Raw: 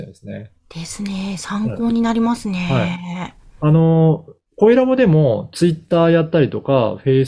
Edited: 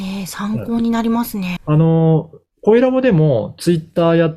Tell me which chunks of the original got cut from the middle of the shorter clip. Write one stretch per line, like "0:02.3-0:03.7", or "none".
0:02.7-0:03.5